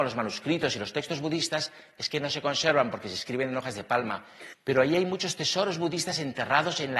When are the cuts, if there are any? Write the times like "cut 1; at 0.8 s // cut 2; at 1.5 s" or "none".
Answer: cut 1; at 4.5 s